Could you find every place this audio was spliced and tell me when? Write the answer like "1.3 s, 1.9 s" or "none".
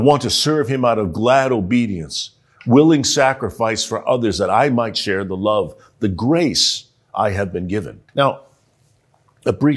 8.1 s